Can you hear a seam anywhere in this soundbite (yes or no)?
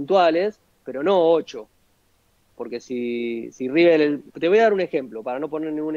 yes